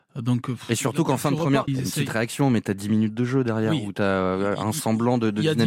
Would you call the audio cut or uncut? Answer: cut